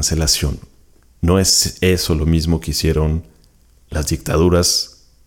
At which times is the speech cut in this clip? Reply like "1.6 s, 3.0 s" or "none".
1.0 s